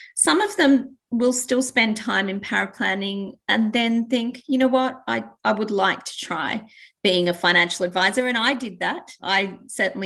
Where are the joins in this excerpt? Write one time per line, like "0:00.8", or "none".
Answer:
none